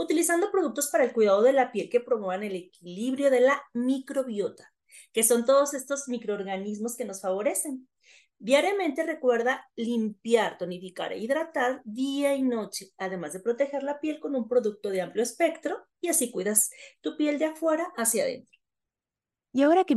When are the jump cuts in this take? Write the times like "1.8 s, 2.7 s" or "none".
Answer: none